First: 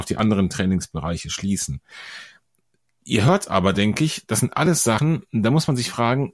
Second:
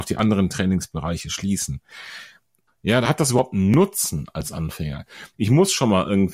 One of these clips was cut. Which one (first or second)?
second